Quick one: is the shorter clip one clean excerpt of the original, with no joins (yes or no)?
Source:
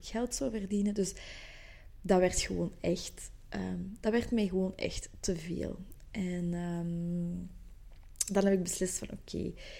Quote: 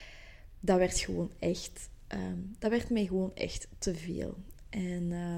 yes